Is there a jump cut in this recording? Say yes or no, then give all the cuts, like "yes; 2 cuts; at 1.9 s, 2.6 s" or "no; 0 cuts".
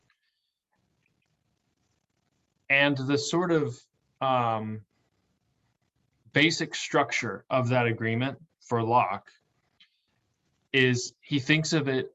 no; 0 cuts